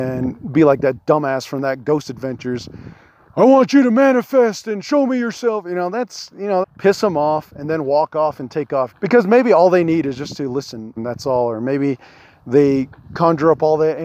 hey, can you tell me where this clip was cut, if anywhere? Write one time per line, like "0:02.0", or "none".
0:06.6
0:08.9
0:11.0